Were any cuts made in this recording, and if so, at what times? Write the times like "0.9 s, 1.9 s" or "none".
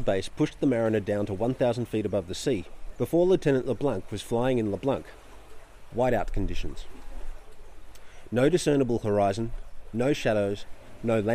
3.0 s